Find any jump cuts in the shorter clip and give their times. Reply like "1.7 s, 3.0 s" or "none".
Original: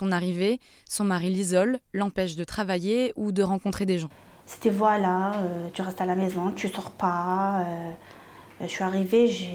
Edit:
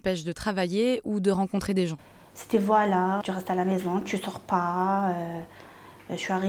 3.2 s